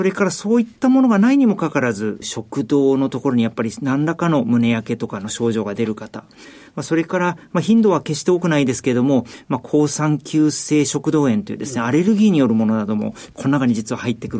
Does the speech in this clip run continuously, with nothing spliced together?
yes; 0 cuts

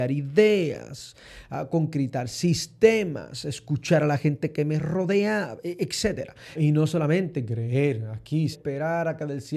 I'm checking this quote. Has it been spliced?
yes; 2 cuts; at 6.5 s, 8.5 s

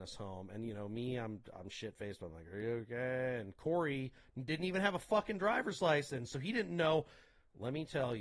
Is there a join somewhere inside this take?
no; 0 cuts

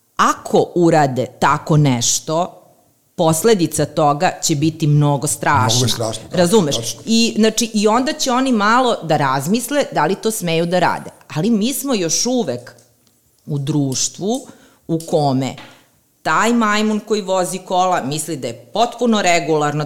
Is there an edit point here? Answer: no; 0 cuts

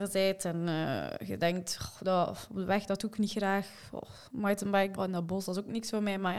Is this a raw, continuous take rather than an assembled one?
no; 1 cut; at 5.0 s

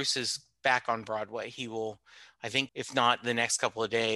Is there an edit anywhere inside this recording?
yes; 1 cut; at 2.7 s

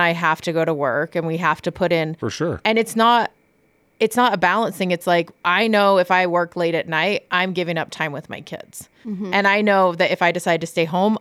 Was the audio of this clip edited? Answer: no; 0 cuts

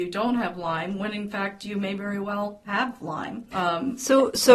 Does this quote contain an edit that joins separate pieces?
yes; 1 cut; at 3.5 s

